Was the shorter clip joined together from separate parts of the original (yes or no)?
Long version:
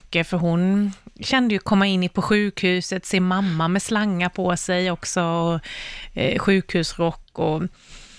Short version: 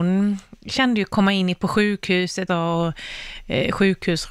yes